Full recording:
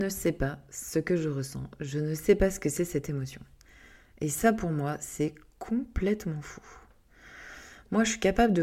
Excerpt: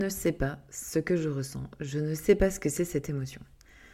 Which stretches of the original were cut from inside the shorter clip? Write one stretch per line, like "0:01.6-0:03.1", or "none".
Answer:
none